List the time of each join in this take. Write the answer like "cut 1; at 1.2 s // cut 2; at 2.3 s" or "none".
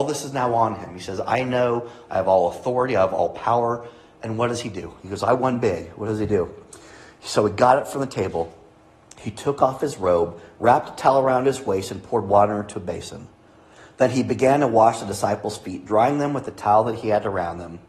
none